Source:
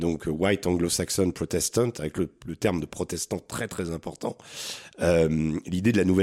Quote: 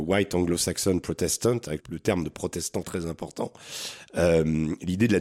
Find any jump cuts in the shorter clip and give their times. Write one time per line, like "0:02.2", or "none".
0:01.8
0:02.8